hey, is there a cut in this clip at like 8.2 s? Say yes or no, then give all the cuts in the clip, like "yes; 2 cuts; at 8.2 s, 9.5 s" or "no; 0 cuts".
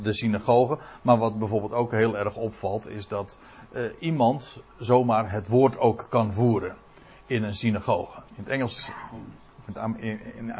yes; 1 cut; at 8.2 s